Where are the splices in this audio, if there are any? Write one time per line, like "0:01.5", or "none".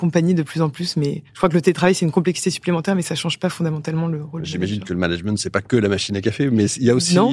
0:01.3